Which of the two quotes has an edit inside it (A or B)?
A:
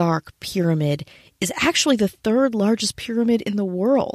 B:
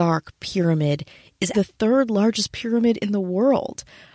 B